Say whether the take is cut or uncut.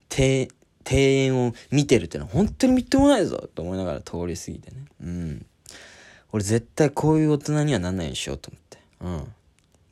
uncut